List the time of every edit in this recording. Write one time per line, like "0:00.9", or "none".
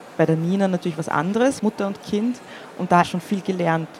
0:01.6
0:03.0